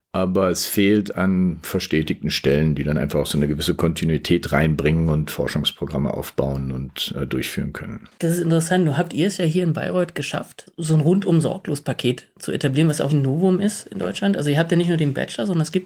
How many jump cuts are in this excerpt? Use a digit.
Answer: 1